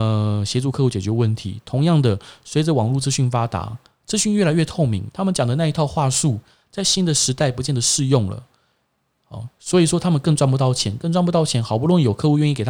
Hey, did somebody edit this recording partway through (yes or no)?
no